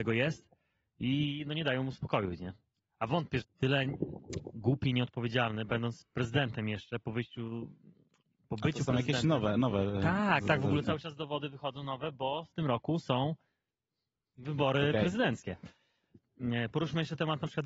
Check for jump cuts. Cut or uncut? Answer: cut